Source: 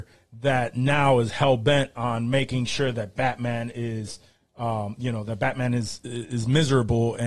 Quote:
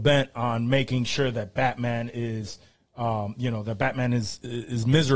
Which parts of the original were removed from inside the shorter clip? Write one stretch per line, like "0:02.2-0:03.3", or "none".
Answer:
none